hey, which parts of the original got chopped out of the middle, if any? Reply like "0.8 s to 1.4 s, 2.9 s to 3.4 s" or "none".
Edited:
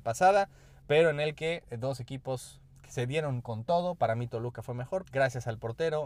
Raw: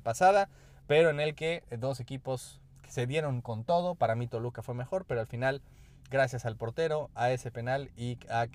5.0 s to 6.0 s